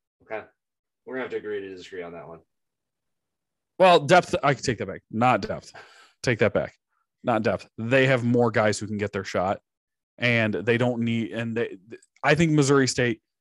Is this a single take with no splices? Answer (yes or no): no